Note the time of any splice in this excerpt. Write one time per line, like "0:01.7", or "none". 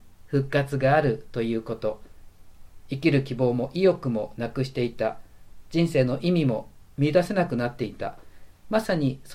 0:02.8

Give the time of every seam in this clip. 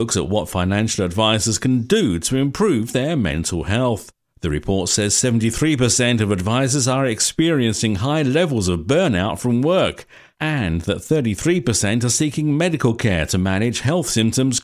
none

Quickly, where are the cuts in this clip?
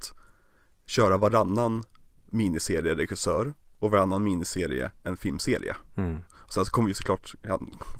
0:06.3

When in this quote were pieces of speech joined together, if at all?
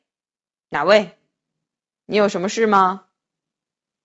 none

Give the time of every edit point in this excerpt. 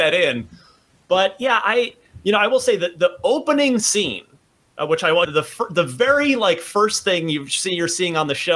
0:05.2

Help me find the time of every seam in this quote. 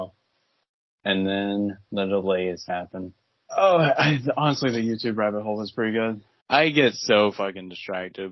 0:03.5
0:06.4

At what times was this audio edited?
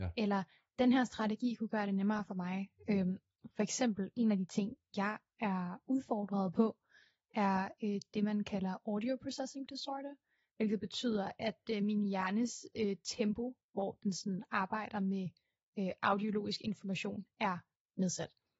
none

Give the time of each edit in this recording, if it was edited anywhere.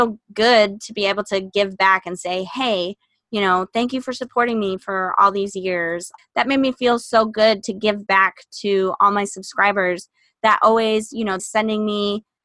0:06.2
0:11.4

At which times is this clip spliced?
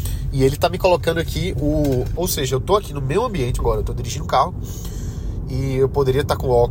0:02.2
0:03.6

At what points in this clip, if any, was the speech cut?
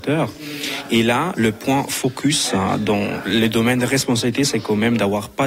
none

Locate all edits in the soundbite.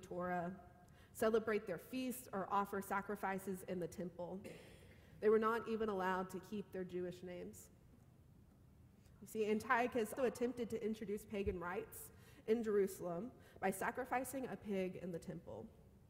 0:09.2
0:10.2

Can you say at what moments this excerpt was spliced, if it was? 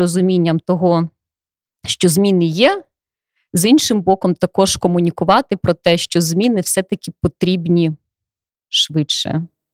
none

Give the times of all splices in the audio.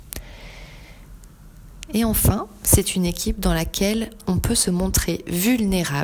0:01.9

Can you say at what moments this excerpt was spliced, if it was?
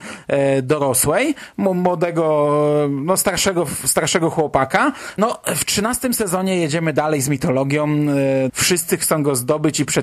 0:05.2
0:08.5

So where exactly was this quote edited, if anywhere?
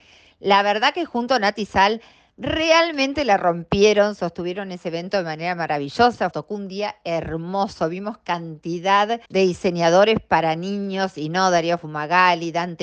0:06.3
0:09.3

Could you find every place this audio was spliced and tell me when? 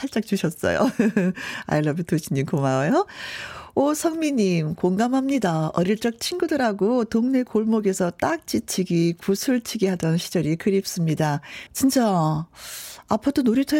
0:11.7

